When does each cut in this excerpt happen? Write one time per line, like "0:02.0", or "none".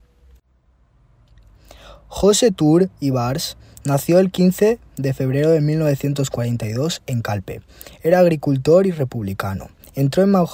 none